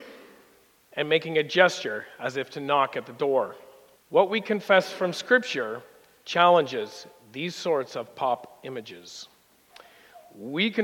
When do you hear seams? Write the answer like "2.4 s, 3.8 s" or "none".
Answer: 4.0 s

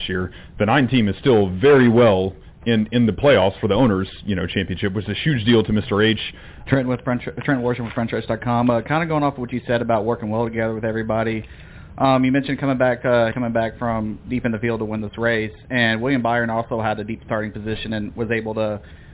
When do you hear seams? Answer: 6.7 s, 13.3 s

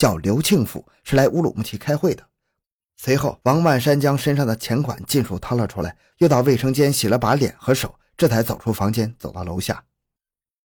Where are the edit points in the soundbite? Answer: 2.8 s, 6.1 s

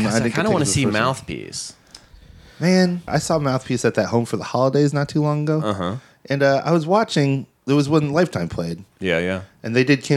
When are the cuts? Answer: 3.1 s

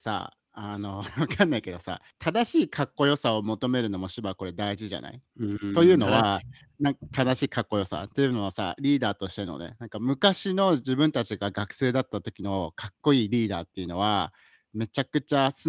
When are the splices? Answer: 2.1 s

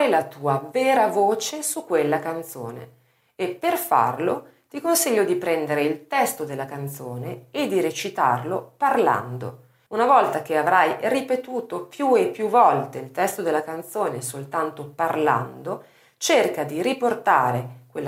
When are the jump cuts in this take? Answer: 9.9 s

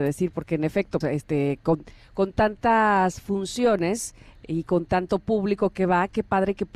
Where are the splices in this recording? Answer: 1.0 s

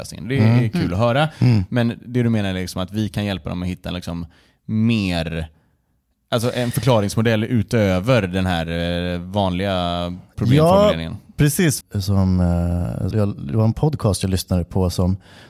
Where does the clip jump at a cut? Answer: 11.8 s, 13.1 s

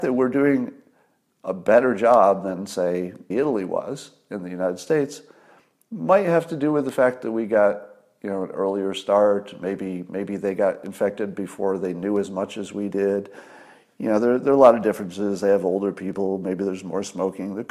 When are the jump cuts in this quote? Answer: 3.3 s

